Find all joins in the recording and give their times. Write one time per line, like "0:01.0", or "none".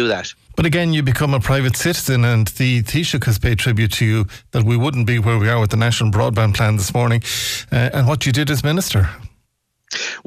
0:07.9